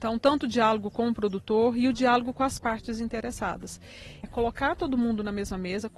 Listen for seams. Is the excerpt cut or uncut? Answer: cut